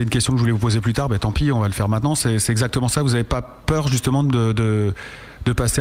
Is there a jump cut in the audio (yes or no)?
no